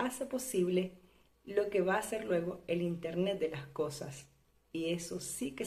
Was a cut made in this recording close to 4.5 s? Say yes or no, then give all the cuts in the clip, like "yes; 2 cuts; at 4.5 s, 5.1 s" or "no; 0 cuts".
no; 0 cuts